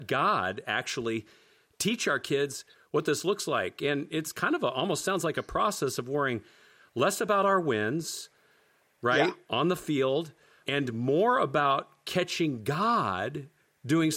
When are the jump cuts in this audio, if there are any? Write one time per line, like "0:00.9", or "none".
0:10.6

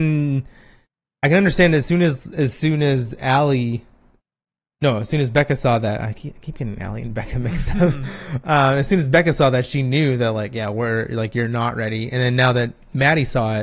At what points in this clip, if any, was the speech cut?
none

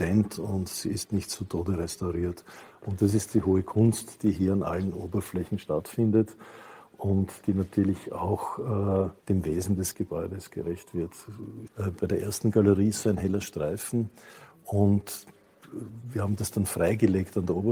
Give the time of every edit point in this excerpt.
0:09.2
0:11.7

